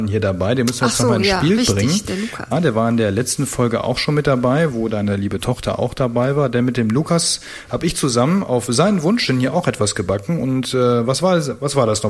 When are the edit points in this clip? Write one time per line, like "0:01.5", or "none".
0:02.5

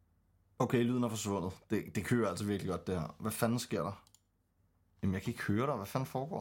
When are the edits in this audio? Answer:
none

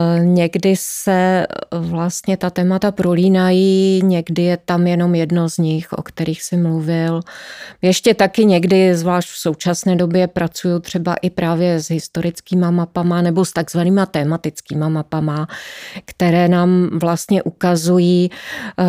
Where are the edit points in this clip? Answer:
none

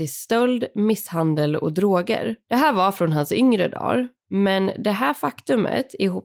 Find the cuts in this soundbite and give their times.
0:02.4

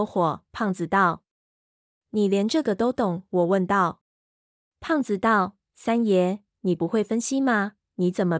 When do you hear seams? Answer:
none

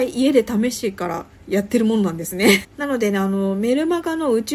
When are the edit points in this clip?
0:02.6

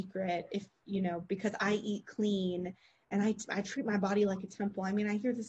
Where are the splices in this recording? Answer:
none

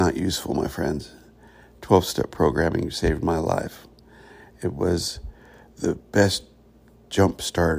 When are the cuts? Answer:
none

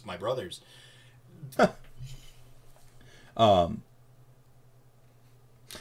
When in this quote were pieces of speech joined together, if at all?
0:01.6

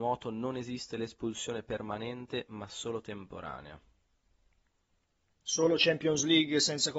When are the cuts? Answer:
0:05.3

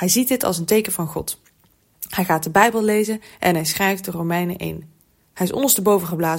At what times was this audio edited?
0:05.3

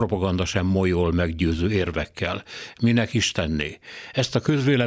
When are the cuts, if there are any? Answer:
none

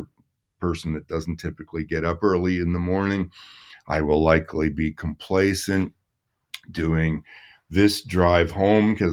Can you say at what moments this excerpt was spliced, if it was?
0:03.8

